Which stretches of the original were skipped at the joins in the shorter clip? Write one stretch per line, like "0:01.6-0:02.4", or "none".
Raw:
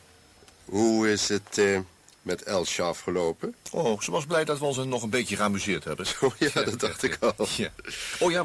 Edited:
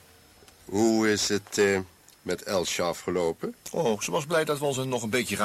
none